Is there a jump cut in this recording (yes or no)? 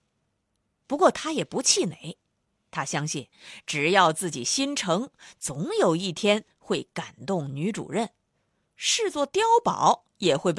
no